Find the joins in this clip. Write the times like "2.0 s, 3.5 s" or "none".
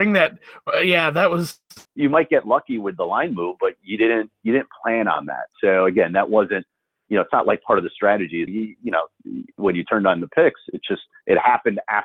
1.9 s, 8.5 s